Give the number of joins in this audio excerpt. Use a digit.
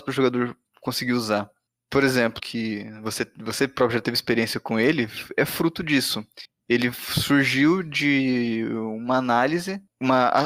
1